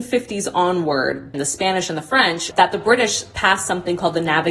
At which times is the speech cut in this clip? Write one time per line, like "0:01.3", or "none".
0:01.3
0:02.5